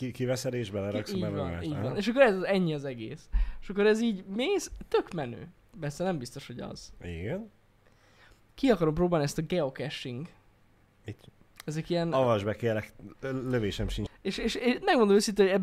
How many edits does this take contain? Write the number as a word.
three